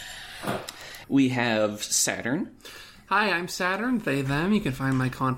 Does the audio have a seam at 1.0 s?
yes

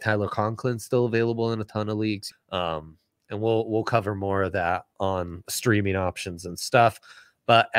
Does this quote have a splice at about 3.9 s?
no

